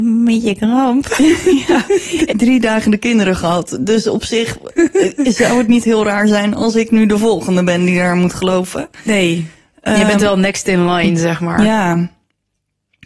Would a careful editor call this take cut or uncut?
cut